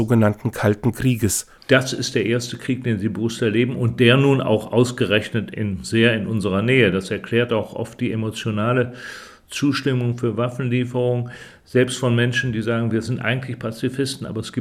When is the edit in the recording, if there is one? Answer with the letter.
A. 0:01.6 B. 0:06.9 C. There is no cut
A